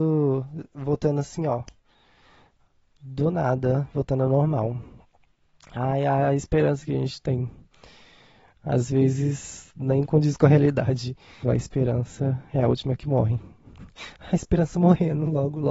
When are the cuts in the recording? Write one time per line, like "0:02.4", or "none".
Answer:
0:11.4